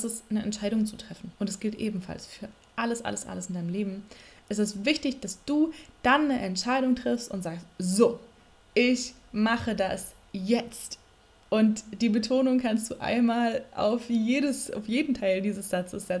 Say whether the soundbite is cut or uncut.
cut